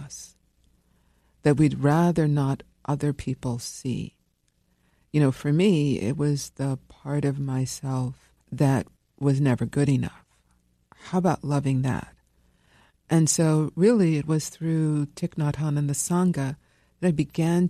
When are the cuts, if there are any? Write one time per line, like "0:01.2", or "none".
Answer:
0:08.4